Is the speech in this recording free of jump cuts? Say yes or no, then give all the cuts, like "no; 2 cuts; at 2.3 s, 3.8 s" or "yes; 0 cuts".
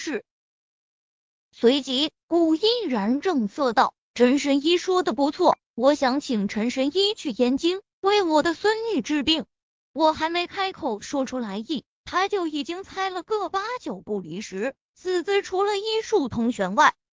no; 1 cut; at 9.8 s